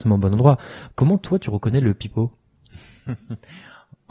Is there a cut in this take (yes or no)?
yes